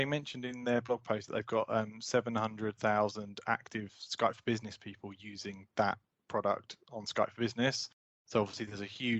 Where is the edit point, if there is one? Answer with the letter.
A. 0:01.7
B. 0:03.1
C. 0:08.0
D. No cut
D